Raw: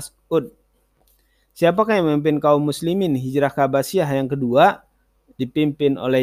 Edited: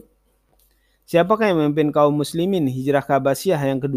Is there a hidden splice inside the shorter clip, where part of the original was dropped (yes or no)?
no